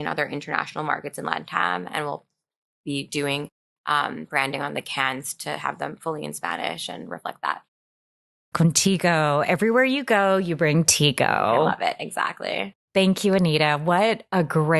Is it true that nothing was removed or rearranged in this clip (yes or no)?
no